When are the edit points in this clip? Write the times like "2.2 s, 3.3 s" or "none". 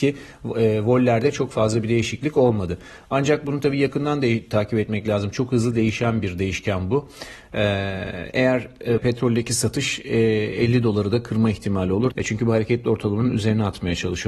9.0 s, 12.1 s